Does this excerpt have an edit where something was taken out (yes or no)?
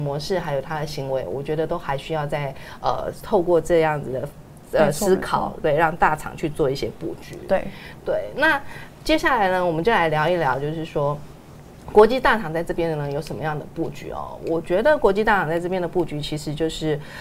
no